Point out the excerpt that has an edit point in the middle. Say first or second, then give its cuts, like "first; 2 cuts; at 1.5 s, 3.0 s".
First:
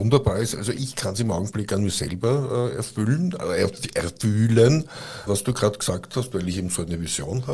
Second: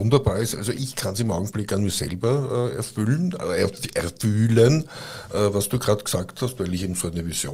first; 1 cut; at 5.3 s